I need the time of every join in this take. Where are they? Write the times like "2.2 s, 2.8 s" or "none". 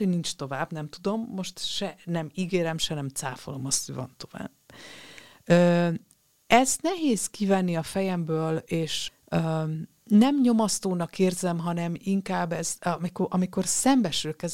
9.1 s